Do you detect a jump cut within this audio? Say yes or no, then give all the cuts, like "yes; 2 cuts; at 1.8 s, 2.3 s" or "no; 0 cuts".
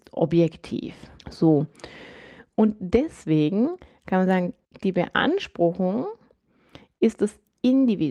yes; 1 cut; at 1.2 s